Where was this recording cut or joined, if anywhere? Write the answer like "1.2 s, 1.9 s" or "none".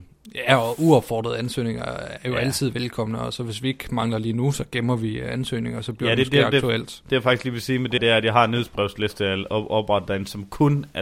8.0 s